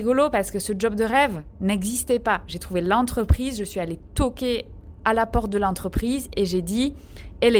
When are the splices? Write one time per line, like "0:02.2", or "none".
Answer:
none